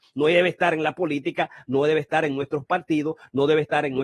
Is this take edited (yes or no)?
no